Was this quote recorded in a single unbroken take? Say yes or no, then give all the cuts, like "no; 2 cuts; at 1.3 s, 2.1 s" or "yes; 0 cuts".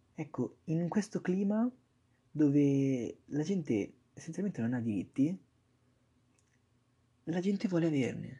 yes; 0 cuts